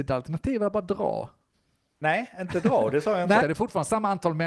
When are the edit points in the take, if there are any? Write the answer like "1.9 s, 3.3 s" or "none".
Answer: 3.4 s